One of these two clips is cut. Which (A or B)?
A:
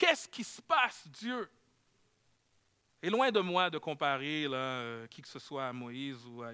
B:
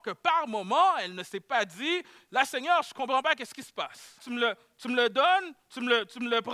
B